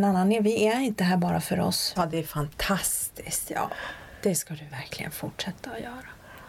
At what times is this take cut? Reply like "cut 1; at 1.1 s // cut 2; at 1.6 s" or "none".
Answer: cut 1; at 2.0 s